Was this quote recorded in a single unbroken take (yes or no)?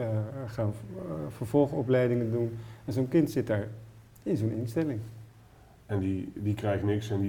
yes